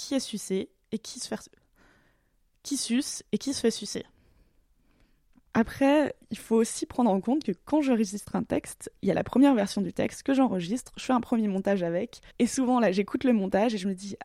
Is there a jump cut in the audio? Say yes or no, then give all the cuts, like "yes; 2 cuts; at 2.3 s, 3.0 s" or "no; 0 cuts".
yes; 2 cuts; at 5.5 s, 12.3 s